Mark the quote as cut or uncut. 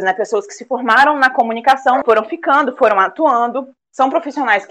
cut